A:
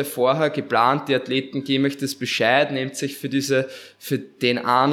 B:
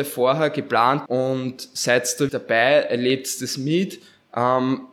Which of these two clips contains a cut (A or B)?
B